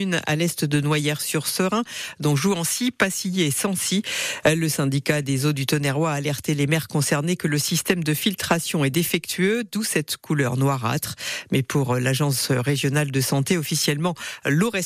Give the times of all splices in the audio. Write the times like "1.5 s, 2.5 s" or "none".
none

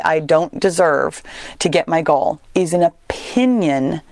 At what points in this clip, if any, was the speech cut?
2.5 s

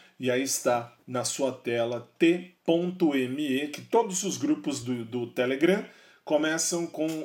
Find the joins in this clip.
none

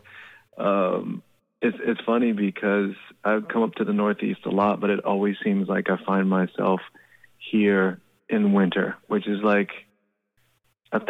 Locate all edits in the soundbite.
none

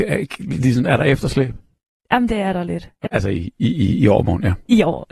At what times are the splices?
3.0 s

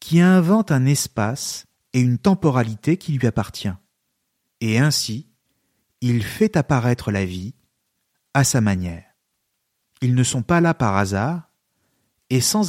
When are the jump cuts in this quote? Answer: 9.8 s

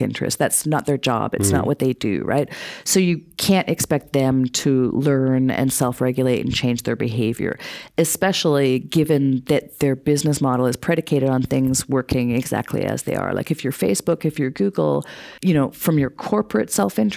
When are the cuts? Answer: 15.4 s

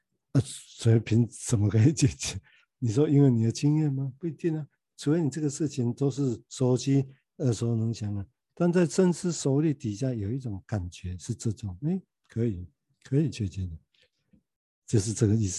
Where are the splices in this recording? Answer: 8.5 s

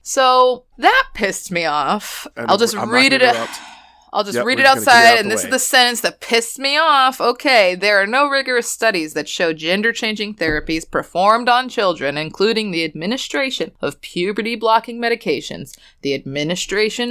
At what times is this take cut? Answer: 2.3 s

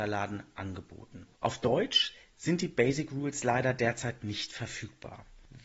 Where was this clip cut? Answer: 1.4 s

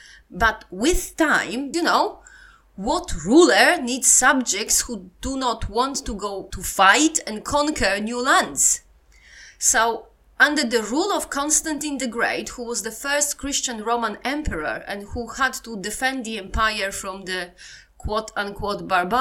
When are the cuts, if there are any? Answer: 1.7 s

